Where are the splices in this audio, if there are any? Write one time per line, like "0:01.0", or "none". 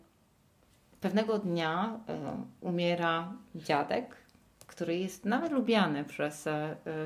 none